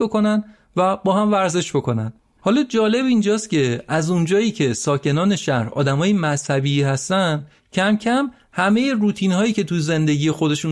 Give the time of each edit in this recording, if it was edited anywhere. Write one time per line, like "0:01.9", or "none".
none

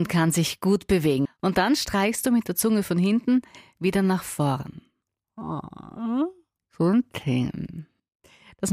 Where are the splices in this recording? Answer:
0:01.2
0:06.6

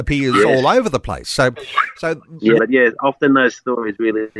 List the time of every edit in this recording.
0:02.6

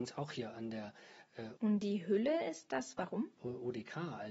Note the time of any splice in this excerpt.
0:01.6
0:03.4

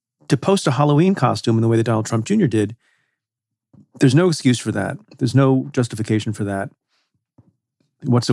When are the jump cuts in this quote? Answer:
none

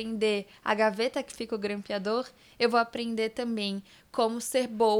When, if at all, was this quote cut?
none

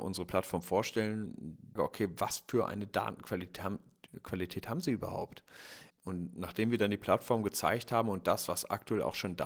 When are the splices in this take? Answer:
0:01.8
0:05.9

